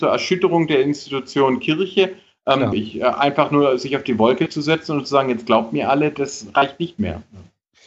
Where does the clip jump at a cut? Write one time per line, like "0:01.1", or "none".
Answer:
0:02.7